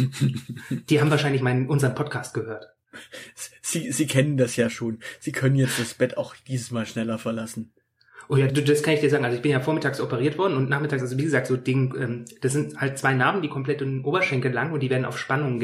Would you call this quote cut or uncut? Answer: cut